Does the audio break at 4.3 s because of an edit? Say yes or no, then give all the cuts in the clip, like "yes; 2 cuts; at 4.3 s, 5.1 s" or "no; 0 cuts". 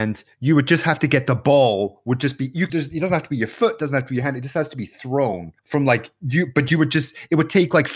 no; 2 cuts; at 2.7 s, 5.6 s